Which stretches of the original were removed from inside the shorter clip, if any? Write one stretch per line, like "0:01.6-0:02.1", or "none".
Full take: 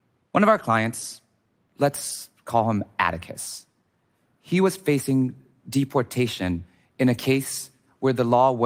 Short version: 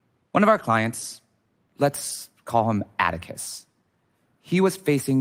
none